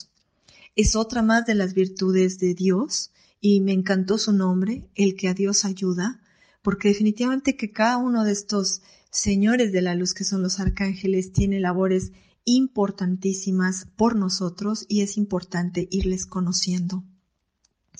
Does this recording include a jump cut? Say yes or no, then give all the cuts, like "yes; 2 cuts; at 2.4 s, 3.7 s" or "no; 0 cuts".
no; 0 cuts